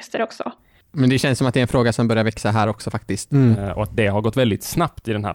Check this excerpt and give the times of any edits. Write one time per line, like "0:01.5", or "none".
0:03.3